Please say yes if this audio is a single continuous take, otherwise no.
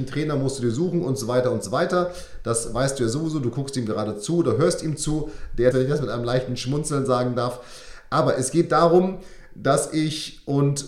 no